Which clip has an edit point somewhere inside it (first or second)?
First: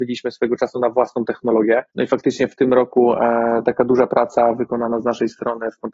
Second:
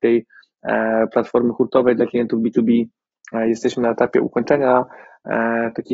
first